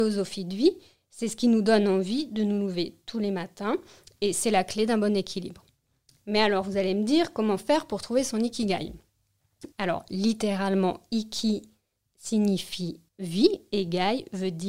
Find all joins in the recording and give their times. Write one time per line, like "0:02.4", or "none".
0:09.7
0:13.1